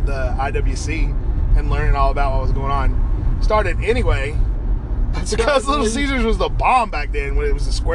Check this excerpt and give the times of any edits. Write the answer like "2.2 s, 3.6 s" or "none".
5.1 s